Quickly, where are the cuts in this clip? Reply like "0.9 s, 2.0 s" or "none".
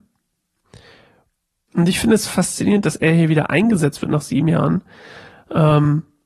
1.7 s